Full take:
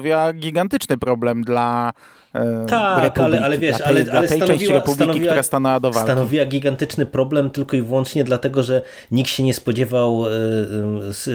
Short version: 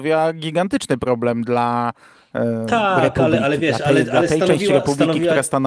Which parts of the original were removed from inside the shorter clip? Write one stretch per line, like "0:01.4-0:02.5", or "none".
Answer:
none